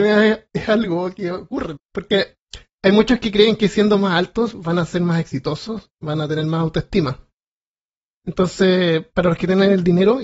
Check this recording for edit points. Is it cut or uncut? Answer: cut